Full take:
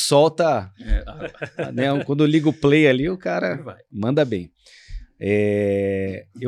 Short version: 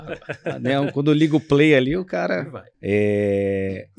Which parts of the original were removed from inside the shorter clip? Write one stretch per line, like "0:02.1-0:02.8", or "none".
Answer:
0:03.9-0:05.1

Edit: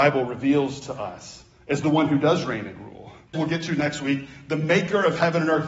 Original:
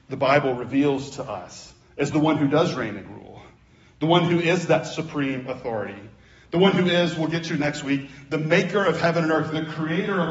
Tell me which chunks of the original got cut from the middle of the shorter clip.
0:03.6-0:07.2

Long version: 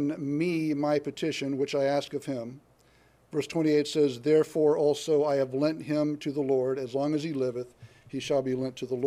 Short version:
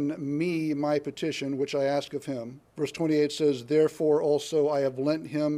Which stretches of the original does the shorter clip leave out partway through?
0:02.7-0:03.2

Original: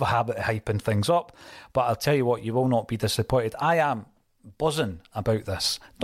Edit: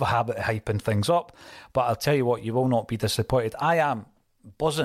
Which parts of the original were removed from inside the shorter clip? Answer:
none

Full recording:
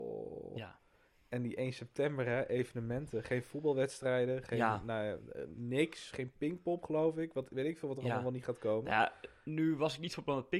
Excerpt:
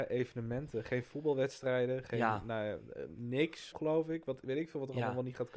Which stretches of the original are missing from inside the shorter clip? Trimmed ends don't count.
0:06.1-0:06.8

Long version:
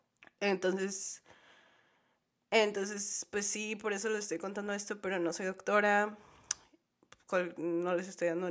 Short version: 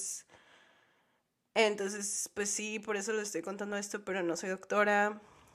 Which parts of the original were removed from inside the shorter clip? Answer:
none

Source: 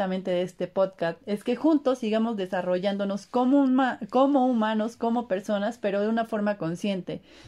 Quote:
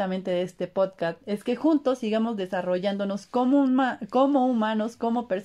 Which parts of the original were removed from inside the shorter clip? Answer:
none

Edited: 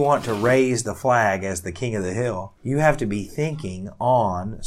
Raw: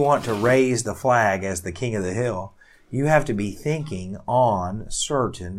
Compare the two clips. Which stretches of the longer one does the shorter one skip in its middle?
0:02.6-0:02.8

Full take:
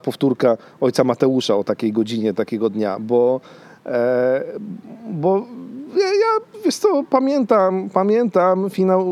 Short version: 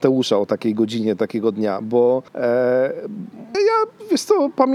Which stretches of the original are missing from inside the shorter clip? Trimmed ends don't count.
0:03.5-0:03.8
0:05.1-0:06.1

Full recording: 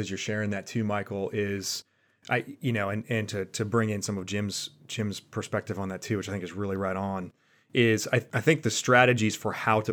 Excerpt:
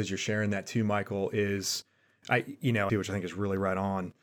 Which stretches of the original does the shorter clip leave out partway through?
0:02.9-0:06.1

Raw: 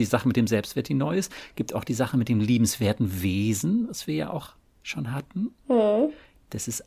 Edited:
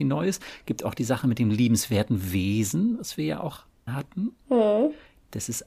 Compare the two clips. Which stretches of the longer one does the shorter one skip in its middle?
0:04.8-0:05.1

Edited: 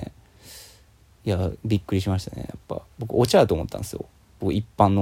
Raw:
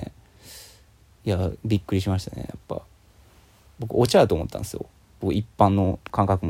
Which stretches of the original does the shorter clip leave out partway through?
0:02.9-0:03.7

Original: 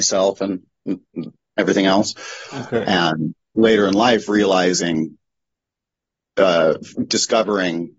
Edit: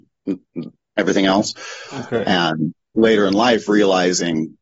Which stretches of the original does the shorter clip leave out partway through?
none

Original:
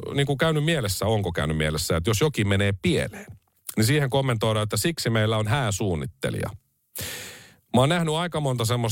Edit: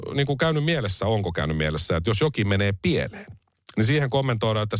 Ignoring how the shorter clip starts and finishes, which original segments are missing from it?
none

